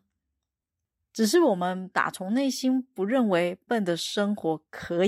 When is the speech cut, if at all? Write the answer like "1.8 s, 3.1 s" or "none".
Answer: 3.7 s